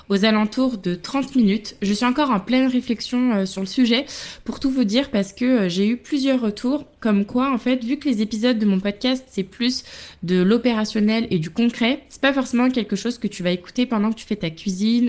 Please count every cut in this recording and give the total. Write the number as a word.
zero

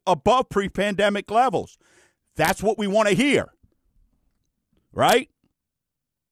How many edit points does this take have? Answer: zero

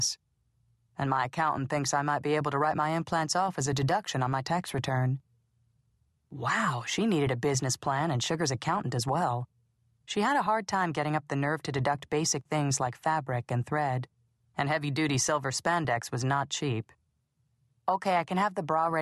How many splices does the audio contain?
zero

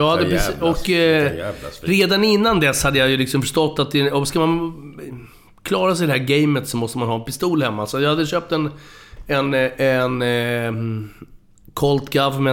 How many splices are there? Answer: zero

